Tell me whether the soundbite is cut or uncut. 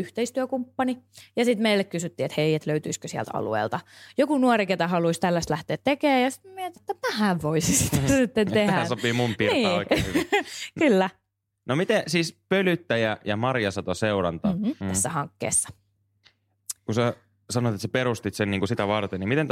cut